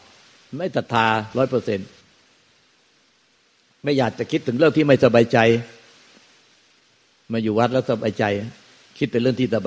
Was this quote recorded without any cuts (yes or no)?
yes